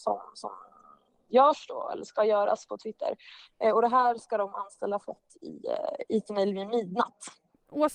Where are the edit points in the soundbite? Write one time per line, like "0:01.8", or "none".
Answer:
0:03.5